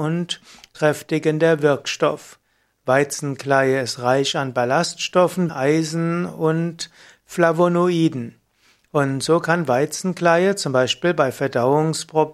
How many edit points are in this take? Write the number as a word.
one